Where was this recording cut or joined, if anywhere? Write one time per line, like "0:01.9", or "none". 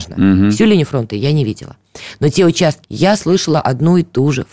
0:02.8